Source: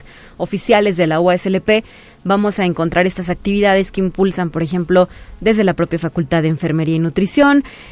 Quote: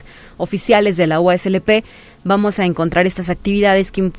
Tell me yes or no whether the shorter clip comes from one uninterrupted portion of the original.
yes